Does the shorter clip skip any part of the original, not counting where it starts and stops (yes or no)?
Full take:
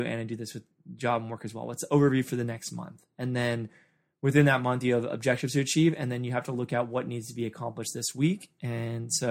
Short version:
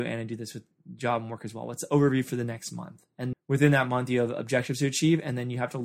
yes